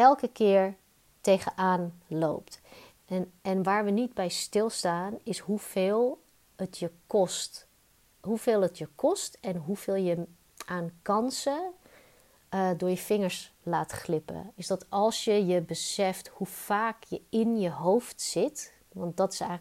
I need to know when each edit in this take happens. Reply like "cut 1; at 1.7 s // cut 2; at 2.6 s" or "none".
cut 1; at 14.5 s